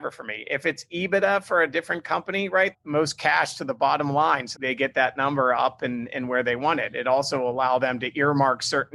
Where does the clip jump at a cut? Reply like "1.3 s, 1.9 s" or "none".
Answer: 2.7 s, 4.5 s